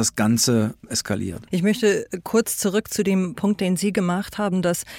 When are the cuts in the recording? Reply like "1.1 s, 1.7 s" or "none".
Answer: 1.5 s